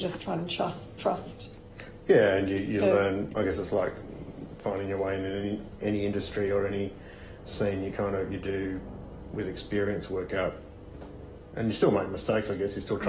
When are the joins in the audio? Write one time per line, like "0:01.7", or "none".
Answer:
0:03.3